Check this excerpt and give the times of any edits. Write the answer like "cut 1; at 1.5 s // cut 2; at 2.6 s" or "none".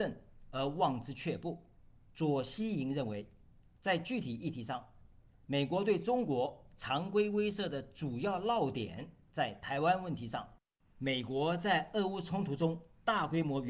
cut 1; at 2.1 s